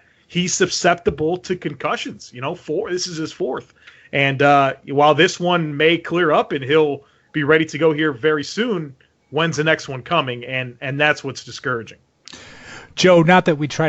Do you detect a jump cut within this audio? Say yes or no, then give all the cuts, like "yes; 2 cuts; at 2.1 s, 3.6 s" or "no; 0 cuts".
no; 0 cuts